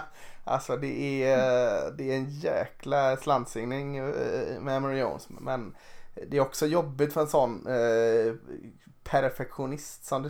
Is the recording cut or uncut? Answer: uncut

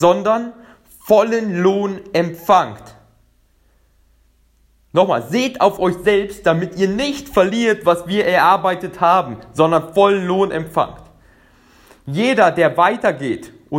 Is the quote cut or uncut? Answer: uncut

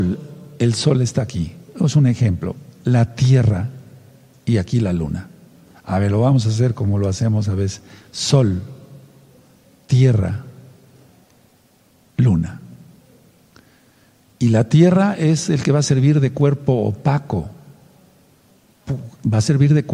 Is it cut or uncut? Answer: uncut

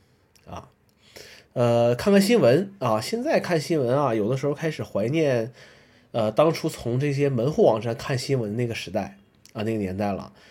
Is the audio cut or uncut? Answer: uncut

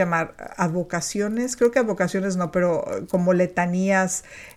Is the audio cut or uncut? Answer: uncut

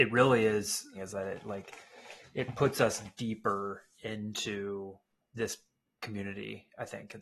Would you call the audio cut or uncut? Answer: cut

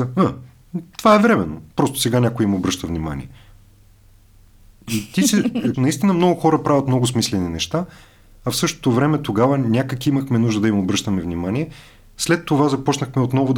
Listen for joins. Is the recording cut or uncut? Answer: cut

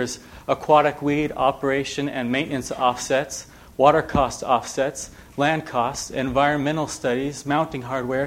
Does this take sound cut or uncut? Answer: uncut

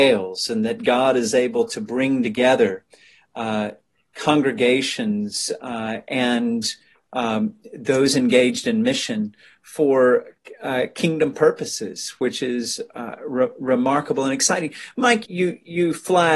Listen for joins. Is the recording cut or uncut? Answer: cut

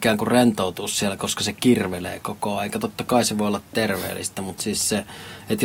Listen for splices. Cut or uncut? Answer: uncut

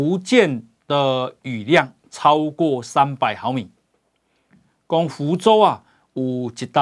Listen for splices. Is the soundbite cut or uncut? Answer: uncut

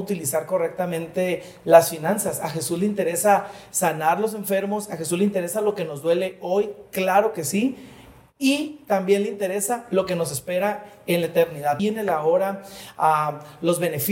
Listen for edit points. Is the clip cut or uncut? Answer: cut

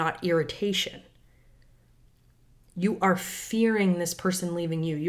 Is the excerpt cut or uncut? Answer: uncut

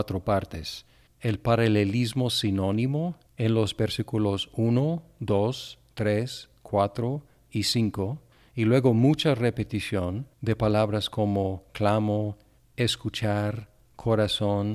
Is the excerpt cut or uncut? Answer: cut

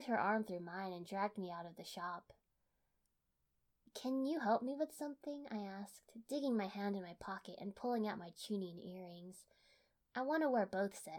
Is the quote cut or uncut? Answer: uncut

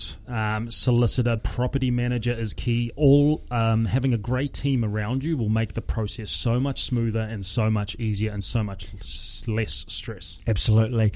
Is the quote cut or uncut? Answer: cut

